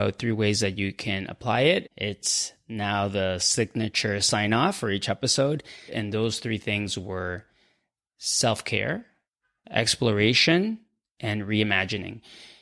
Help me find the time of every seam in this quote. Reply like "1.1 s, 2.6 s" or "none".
1.8 s, 5.9 s